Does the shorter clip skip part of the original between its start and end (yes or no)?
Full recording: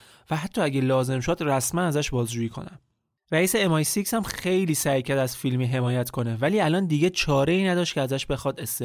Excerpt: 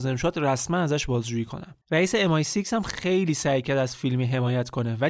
yes